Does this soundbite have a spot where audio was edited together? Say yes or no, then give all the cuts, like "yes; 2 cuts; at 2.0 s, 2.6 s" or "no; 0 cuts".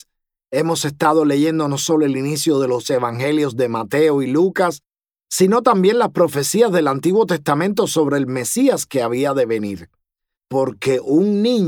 yes; 1 cut; at 10.4 s